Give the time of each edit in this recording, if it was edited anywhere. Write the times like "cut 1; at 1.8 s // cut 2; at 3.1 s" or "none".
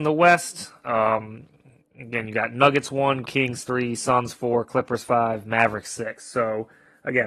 cut 1; at 3.2 s